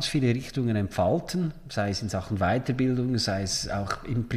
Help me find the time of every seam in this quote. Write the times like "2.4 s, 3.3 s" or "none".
none